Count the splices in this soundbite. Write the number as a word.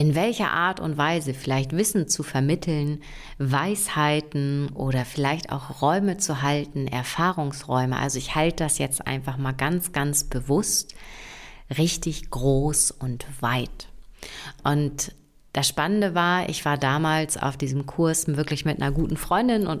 zero